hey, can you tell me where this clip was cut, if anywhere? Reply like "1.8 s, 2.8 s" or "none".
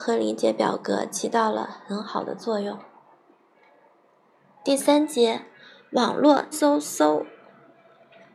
6.5 s